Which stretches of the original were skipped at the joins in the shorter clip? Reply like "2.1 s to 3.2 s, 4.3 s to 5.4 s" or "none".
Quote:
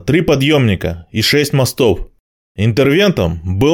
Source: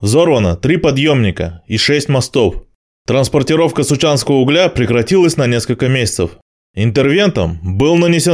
3.0 s to 6.6 s